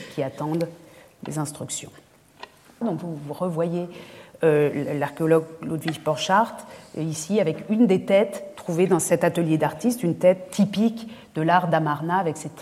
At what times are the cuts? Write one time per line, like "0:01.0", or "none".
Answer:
0:02.8